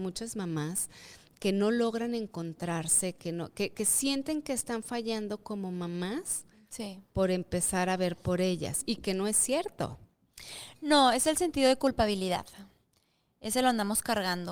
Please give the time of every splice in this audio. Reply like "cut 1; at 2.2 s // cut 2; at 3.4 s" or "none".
none